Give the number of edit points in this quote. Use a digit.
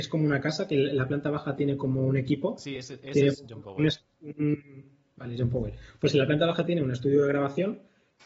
0